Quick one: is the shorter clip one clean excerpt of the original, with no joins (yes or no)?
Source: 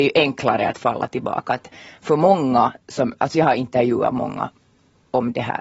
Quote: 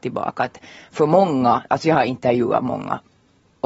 no